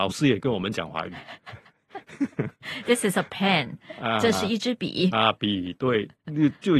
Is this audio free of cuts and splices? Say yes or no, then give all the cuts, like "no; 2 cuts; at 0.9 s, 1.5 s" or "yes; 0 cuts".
yes; 0 cuts